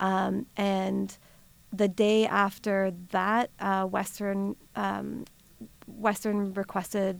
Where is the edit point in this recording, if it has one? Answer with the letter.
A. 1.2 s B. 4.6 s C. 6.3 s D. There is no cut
B